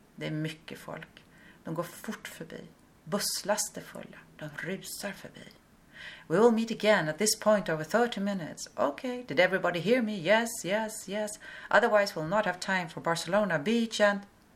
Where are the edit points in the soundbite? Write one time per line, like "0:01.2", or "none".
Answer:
none